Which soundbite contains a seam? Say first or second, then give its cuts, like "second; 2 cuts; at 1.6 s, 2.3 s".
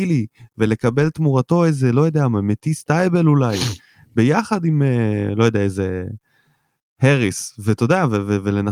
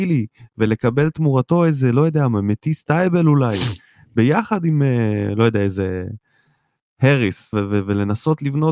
second; 1 cut; at 7.5 s